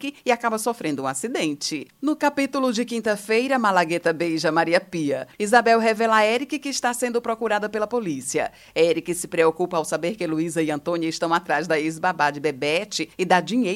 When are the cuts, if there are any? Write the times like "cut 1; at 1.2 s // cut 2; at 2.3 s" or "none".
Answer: cut 1; at 5.4 s

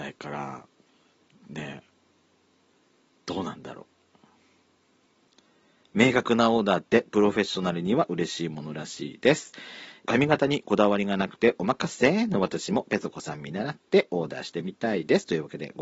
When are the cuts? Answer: cut 1; at 10.0 s

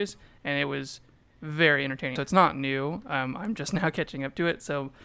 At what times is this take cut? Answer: cut 1; at 2.2 s

